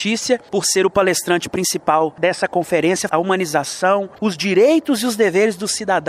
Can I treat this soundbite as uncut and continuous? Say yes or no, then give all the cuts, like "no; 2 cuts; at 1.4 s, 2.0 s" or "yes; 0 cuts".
no; 2 cuts; at 3.1 s, 4.2 s